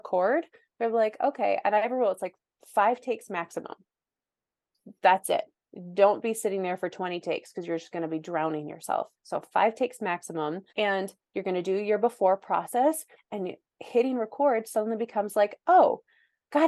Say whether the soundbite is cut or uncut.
cut